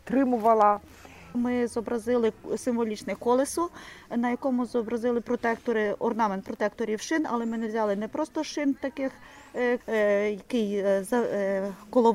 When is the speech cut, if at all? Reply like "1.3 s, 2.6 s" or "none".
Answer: 1.3 s, 9.8 s